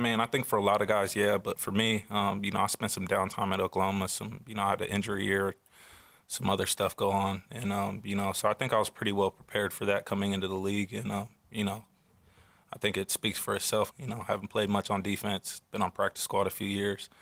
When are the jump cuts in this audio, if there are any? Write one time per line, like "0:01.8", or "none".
0:13.9

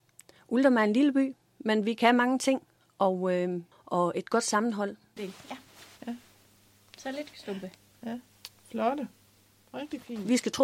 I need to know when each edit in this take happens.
0:03.7
0:05.2

